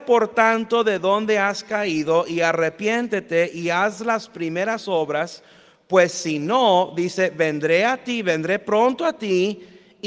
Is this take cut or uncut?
uncut